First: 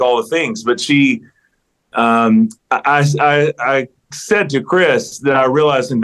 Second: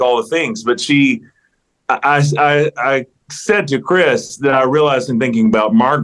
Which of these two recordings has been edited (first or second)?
second